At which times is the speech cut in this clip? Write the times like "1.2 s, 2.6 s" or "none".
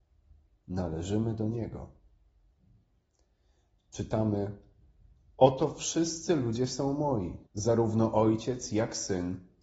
7.5 s